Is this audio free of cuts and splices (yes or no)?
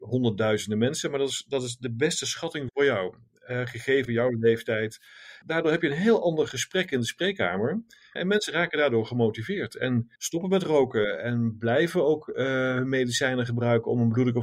no